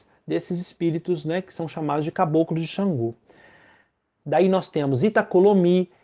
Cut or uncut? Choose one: cut